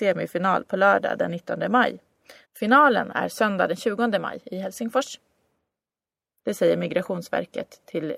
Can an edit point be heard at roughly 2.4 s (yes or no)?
yes